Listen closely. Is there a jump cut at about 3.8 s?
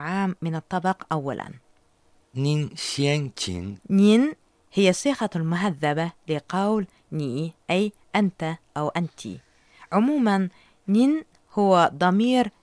yes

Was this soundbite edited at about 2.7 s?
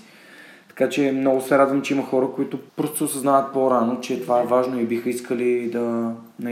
yes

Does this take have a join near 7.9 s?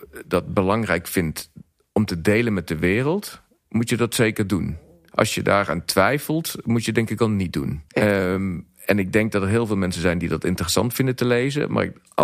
yes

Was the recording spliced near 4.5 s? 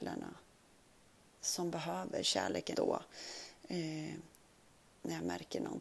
no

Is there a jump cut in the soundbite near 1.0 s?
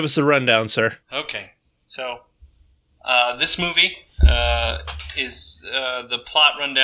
yes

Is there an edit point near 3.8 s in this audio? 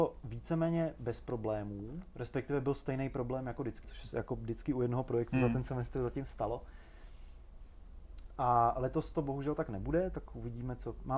yes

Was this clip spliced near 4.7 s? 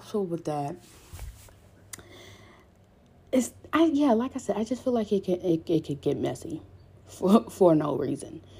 no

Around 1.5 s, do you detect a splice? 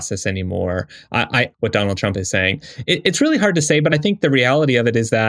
yes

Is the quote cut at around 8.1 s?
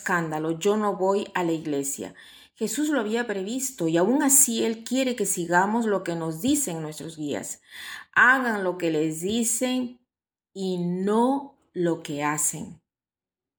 no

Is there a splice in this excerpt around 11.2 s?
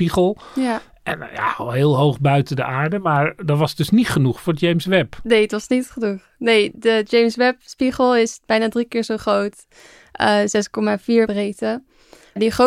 yes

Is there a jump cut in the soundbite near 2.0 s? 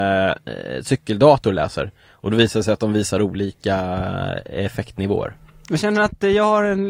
no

